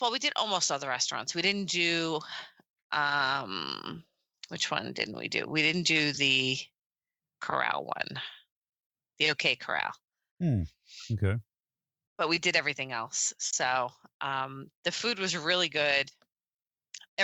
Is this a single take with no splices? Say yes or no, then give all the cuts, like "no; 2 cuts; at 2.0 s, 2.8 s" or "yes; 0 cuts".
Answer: yes; 0 cuts